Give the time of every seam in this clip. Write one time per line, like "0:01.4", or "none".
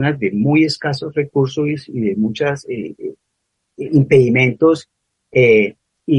none